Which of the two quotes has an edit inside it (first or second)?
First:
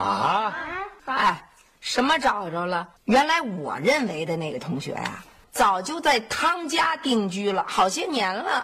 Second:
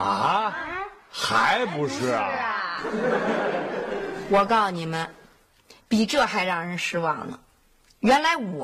first